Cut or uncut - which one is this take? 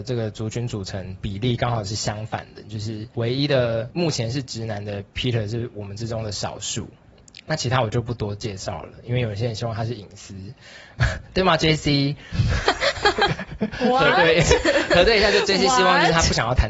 uncut